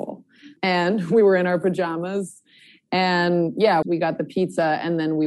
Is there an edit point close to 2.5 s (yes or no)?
no